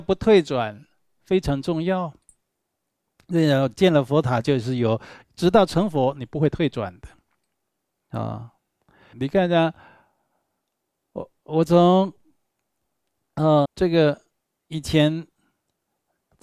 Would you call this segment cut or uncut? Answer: cut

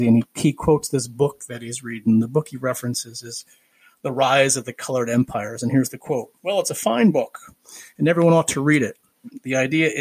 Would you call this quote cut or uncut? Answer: uncut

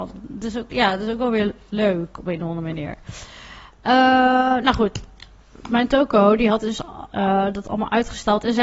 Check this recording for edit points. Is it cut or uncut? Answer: uncut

